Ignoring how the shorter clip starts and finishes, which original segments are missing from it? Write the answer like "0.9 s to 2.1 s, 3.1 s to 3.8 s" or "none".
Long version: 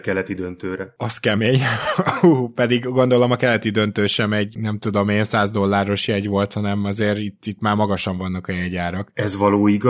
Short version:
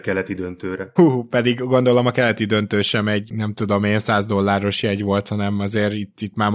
1.0 s to 2.2 s